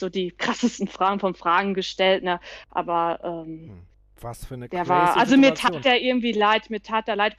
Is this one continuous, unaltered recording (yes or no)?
yes